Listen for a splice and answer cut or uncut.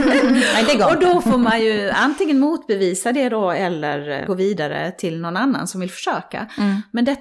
cut